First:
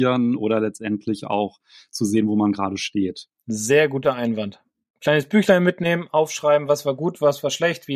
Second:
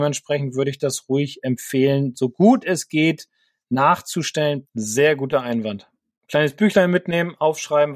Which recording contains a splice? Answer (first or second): second